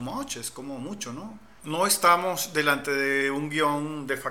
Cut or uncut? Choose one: cut